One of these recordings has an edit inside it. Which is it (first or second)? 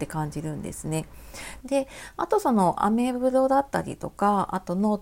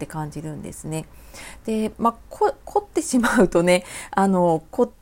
first